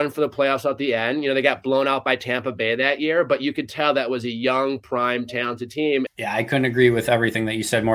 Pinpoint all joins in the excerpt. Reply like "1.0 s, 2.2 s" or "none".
6.1 s